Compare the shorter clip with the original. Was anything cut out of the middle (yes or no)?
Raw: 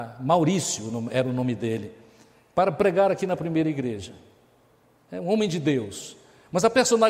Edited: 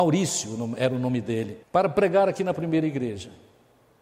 yes